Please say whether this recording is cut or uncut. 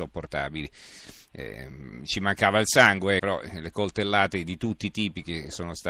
cut